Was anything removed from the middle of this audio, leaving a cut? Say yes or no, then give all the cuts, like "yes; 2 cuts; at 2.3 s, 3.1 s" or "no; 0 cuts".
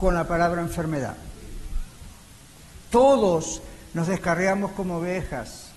no; 0 cuts